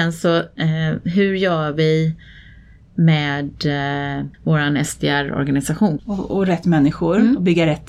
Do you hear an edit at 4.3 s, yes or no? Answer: yes